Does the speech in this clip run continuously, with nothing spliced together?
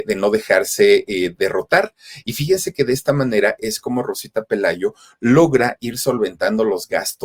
yes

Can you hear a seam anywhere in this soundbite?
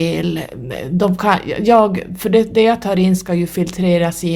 no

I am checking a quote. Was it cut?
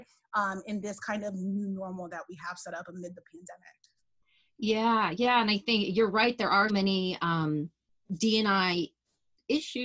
yes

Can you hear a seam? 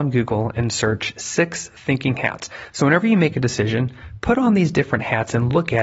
no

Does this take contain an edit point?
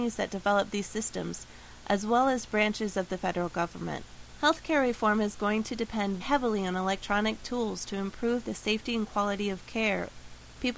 yes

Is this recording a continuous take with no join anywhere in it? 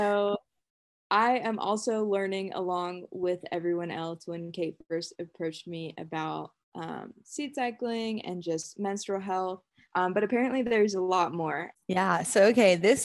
no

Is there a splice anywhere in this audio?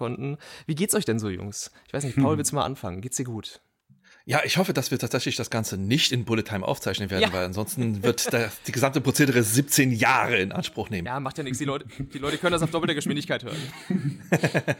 no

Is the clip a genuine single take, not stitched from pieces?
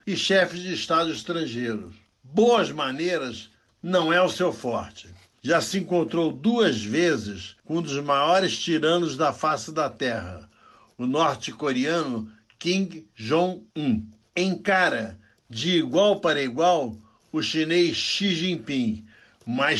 yes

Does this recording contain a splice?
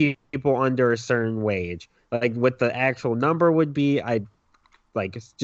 no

